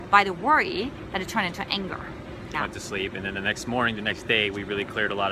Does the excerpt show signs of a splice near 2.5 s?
yes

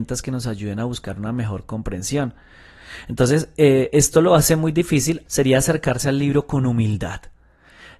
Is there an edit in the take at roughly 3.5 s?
no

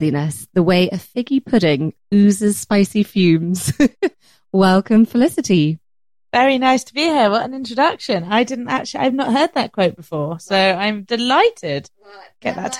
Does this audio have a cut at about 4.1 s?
no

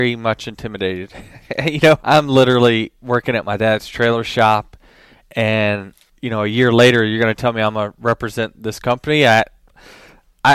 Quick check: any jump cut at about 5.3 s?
no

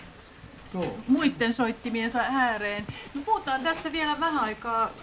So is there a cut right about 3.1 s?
no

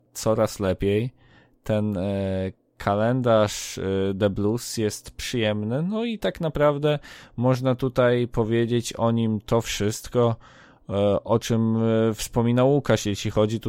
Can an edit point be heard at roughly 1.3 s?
no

